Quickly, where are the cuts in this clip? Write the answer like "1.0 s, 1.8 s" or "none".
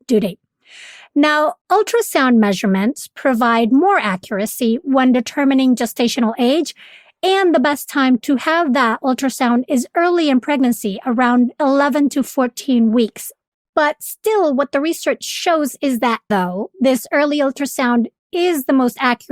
16.3 s